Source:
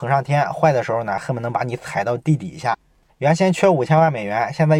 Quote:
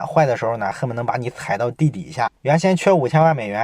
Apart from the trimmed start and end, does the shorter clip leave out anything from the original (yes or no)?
yes